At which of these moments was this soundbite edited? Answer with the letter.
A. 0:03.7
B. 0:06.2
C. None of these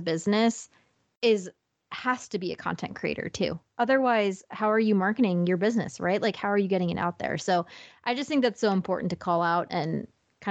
C